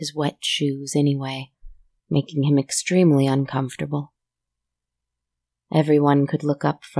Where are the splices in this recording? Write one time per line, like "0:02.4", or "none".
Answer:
0:02.0